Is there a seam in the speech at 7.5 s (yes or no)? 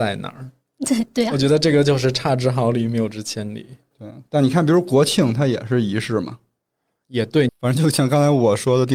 yes